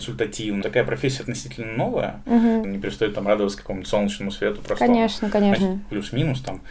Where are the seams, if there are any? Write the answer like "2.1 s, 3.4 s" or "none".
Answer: 2.6 s, 5.6 s